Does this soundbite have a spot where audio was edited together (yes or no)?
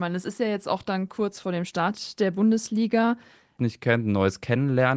yes